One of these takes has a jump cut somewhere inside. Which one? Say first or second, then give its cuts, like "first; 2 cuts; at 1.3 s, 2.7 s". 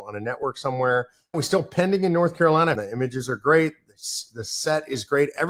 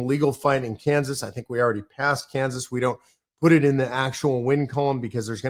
first; 2 cuts; at 1.3 s, 2.7 s